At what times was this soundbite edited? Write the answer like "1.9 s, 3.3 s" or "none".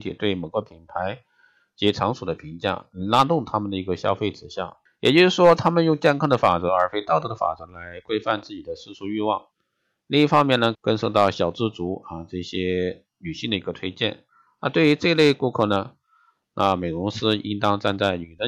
4.9 s, 10.7 s